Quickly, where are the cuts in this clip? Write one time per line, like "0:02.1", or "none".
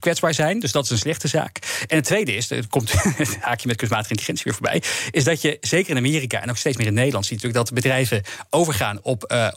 none